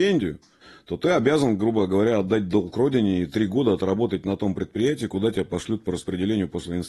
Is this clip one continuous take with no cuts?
yes; 0 cuts

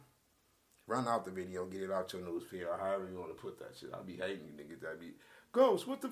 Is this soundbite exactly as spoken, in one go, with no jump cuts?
yes; 0 cuts

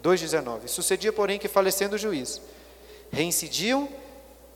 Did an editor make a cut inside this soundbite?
no; 0 cuts

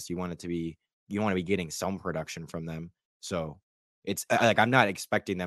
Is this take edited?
no; 0 cuts

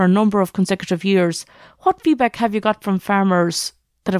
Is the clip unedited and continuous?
yes; 0 cuts

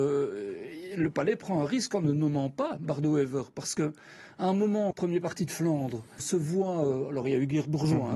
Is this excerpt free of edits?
no; 2 cuts; at 4.9 s, 6.2 s

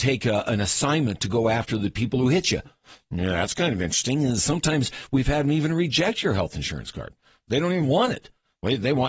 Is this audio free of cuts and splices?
yes; 0 cuts

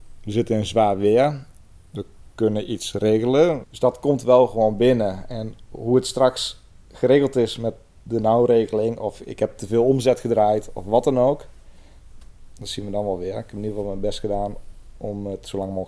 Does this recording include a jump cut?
yes; 1 cut; at 3.6 s

